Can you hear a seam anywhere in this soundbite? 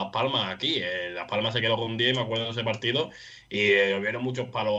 no; 0 cuts

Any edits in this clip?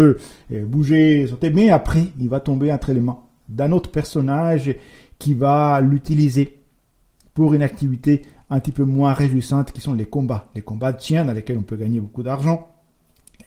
no; 0 cuts

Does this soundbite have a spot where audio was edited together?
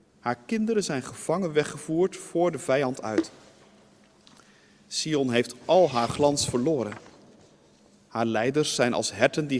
no; 0 cuts

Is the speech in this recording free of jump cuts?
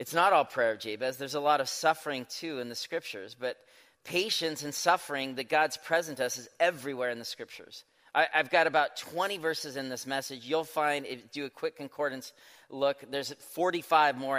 yes; 0 cuts

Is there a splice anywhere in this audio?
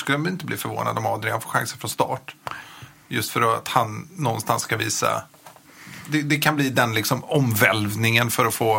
no; 0 cuts

